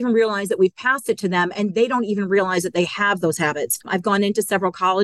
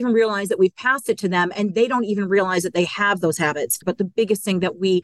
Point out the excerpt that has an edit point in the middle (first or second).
second